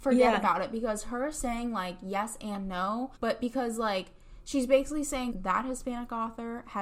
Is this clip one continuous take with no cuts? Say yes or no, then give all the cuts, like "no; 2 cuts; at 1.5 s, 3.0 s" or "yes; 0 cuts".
no; 2 cuts; at 3.2 s, 5.3 s